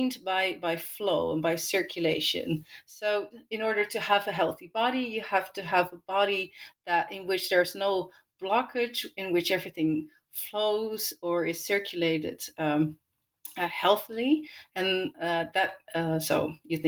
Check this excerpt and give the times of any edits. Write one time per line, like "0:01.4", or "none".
none